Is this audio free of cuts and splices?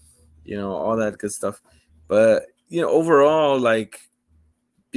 yes; 0 cuts

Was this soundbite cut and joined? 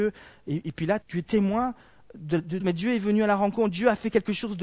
yes; 2 cuts; at 1.0 s, 2.6 s

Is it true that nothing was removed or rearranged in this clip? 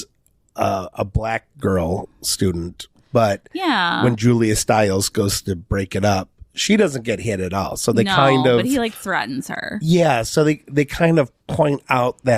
yes; 0 cuts

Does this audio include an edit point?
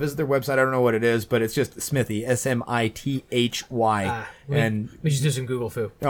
no; 0 cuts

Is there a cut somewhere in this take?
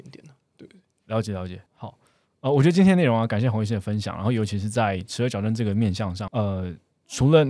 yes; 2 cuts; at 1.7 s, 6.3 s

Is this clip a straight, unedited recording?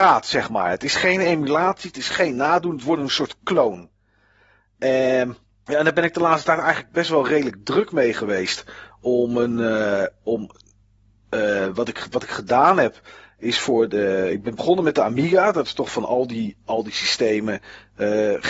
yes; 0 cuts

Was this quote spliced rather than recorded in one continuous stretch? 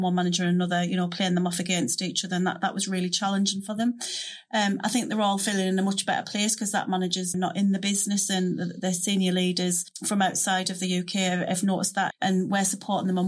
yes; 2 cuts; at 7.3 s, 12.1 s

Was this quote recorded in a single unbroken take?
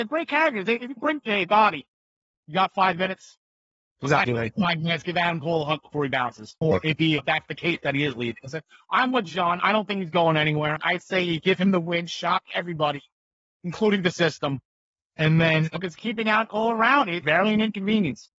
no; 1 cut; at 17.2 s

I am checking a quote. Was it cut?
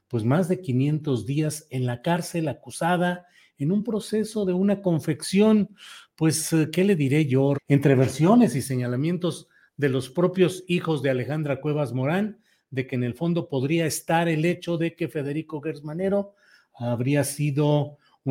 yes; 1 cut; at 7.5 s

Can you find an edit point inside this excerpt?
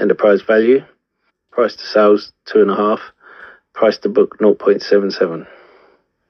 yes; 1 cut; at 1.3 s

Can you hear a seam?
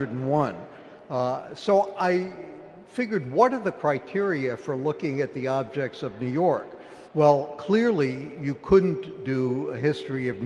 yes; 1 cut; at 7.0 s

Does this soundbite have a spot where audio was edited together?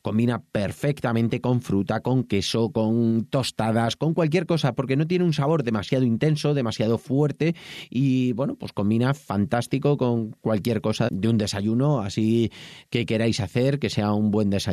yes; 1 cut; at 11.1 s

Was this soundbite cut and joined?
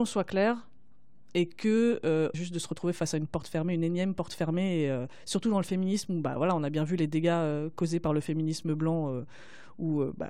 yes; 1 cut; at 2.3 s

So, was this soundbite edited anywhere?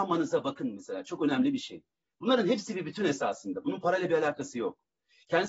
no; 0 cuts

